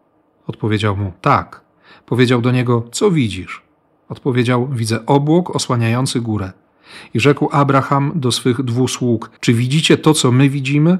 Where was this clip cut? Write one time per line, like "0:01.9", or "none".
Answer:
0:09.4